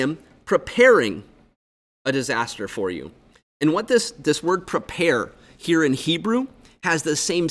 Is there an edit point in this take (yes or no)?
no